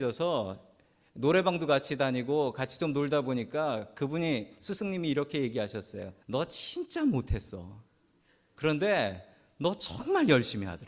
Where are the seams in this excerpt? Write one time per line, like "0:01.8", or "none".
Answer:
0:06.2